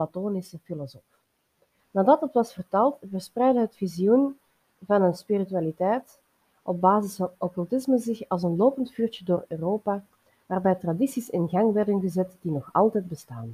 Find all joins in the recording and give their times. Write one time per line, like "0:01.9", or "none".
0:01.8